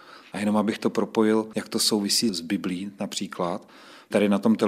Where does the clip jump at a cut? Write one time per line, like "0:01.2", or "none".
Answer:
none